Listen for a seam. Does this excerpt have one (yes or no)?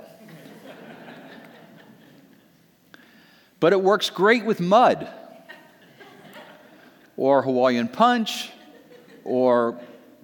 no